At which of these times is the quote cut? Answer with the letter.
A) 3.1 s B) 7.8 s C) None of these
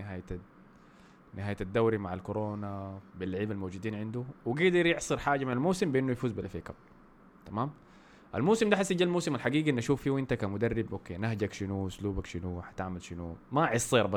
A